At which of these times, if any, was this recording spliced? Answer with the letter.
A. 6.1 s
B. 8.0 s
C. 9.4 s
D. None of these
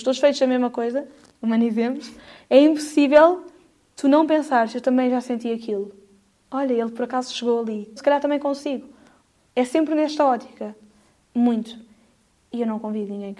B